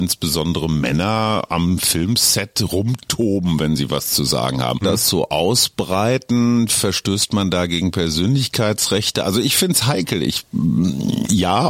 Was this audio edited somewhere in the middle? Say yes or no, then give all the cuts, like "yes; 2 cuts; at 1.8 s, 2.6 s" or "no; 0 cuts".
yes; 1 cut; at 4.8 s